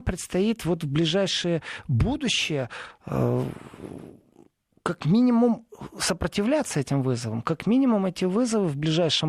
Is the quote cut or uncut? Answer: uncut